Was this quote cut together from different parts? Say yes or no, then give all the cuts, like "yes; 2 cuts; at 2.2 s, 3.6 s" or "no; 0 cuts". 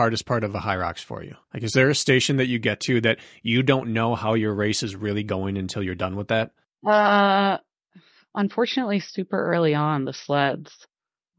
yes; 1 cut; at 1.4 s